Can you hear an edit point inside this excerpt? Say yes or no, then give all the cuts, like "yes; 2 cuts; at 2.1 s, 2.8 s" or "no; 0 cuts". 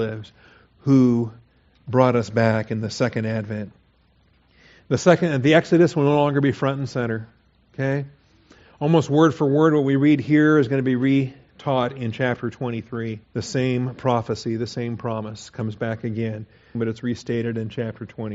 yes; 2 cuts; at 13.2 s, 16.7 s